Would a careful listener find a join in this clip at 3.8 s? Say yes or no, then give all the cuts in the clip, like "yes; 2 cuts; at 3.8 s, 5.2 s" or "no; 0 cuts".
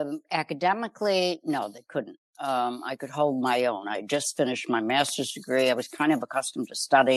no; 0 cuts